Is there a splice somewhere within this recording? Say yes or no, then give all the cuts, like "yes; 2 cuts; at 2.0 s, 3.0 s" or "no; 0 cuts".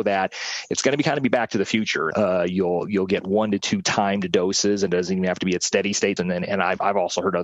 yes; 2 cuts; at 2.1 s, 6.2 s